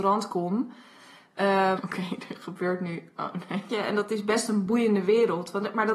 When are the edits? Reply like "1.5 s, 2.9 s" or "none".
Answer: 1.8 s, 3.7 s